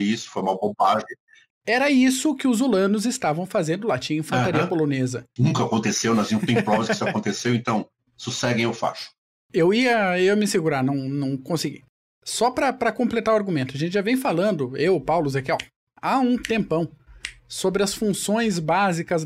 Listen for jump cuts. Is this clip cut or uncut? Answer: cut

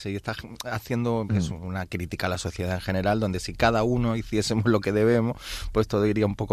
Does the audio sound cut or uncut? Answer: cut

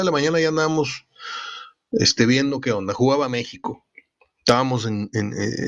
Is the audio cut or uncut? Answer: uncut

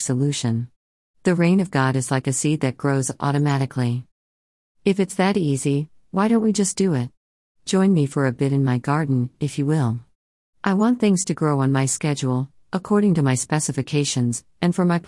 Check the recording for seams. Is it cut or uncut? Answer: uncut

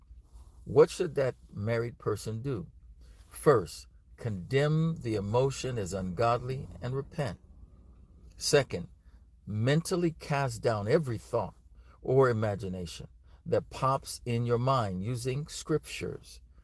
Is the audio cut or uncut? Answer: uncut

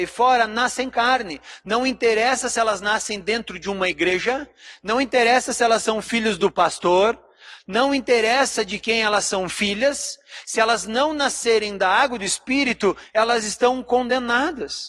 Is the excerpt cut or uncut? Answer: uncut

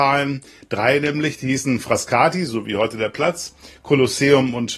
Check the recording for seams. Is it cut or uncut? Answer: uncut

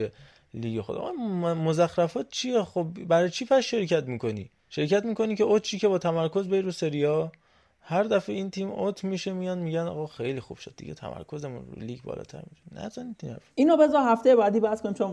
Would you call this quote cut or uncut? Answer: cut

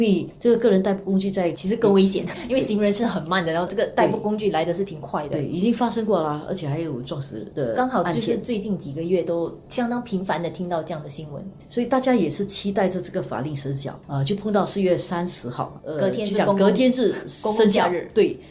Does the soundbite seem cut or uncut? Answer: cut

